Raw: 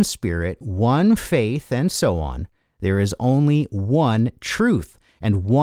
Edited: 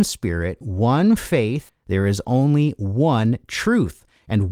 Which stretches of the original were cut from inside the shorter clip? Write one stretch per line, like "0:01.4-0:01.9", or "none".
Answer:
0:01.7-0:02.6